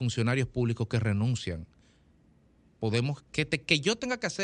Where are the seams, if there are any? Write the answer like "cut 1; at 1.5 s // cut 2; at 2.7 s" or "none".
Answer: cut 1; at 3.2 s